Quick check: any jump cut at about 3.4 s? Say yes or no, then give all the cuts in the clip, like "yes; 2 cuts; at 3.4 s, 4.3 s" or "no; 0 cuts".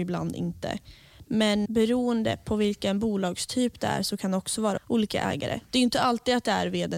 no; 2 cuts; at 1.7 s, 4.8 s